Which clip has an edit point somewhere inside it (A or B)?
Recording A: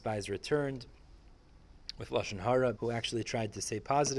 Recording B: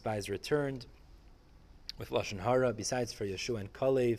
A